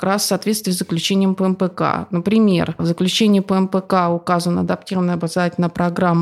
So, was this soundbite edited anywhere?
no; 0 cuts

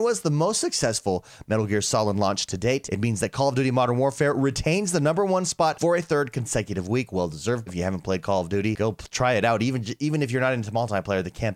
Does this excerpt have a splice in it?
yes; 1 cut; at 7.7 s

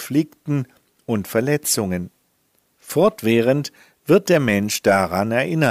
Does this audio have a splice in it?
no; 0 cuts

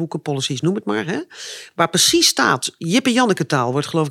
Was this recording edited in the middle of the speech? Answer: no; 0 cuts

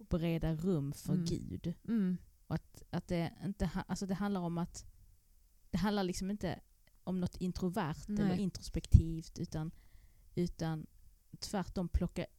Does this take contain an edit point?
no; 0 cuts

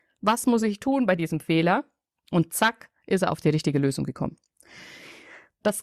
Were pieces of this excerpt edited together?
no; 0 cuts

